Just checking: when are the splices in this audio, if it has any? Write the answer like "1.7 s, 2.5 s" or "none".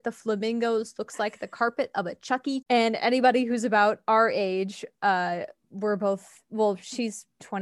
2.6 s